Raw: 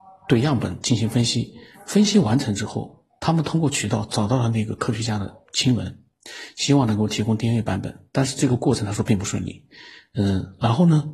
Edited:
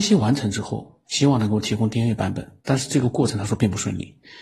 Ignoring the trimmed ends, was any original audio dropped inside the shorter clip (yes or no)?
yes